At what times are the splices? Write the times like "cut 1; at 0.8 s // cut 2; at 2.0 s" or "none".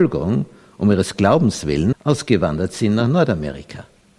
cut 1; at 1.9 s